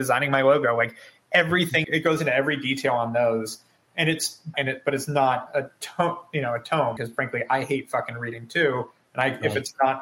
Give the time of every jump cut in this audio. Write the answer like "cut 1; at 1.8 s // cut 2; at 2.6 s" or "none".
cut 1; at 1.8 s // cut 2; at 4.5 s // cut 3; at 7.0 s